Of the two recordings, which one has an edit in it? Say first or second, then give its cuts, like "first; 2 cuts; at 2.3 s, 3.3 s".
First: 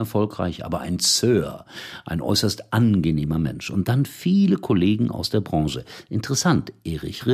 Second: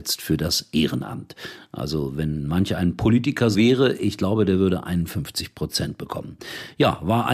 second; 1 cut; at 3.5 s